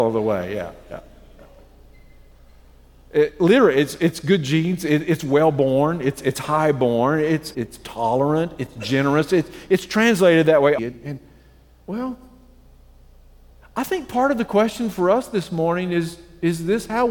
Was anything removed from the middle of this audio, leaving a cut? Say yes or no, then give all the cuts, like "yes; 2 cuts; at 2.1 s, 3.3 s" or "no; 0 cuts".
yes; 2 cuts; at 7.5 s, 10.8 s